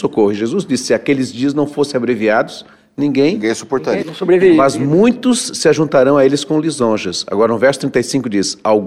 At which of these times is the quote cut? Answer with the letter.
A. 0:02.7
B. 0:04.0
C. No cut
B